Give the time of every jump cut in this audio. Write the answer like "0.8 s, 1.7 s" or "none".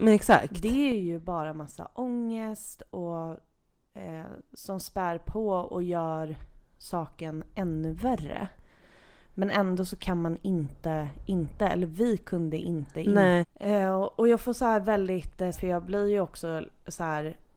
13.4 s, 15.5 s